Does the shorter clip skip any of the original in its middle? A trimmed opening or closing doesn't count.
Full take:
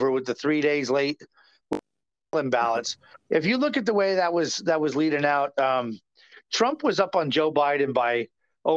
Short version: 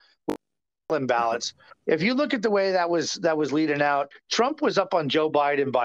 yes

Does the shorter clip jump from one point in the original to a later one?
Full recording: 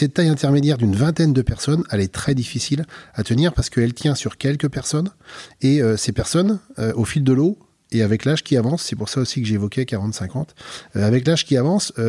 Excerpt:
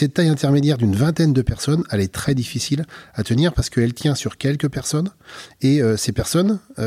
no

